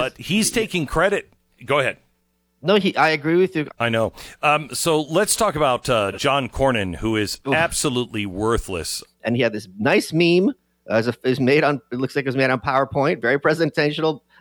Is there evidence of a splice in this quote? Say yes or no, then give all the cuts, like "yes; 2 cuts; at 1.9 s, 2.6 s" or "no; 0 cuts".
yes; 2 cuts; at 3.7 s, 9.0 s